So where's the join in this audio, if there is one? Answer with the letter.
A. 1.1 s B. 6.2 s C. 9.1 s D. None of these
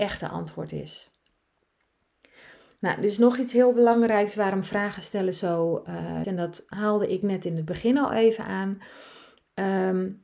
B